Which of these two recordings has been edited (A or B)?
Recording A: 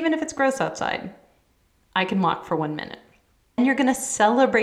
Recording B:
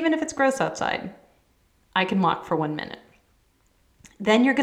A